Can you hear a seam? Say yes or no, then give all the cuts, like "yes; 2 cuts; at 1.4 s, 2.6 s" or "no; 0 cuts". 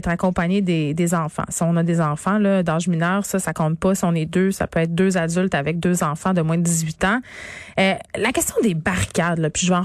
no; 0 cuts